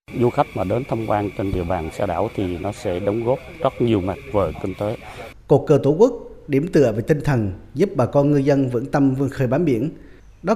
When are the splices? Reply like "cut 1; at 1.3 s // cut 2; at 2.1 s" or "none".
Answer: cut 1; at 5.3 s

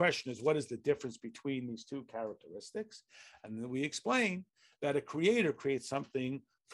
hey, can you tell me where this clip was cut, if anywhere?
none

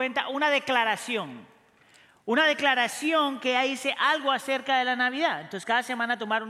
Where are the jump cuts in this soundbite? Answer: none

